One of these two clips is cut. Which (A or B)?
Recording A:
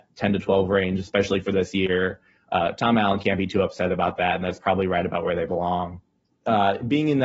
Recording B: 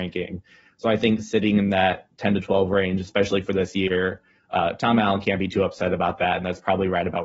A